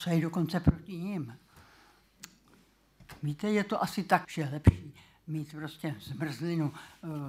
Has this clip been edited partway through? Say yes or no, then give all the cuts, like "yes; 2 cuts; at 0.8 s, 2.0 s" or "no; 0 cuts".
yes; 1 cut; at 4.2 s